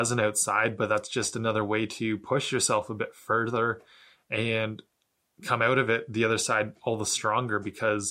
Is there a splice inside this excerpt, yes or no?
no